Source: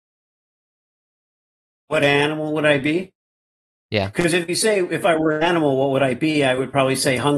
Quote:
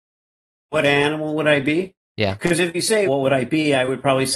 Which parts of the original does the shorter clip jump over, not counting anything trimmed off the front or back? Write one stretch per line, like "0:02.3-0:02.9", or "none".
0:03.2-0:03.8
0:04.8-0:05.8